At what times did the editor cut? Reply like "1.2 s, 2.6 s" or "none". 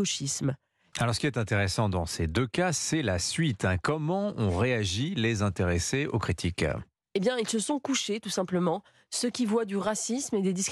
0.9 s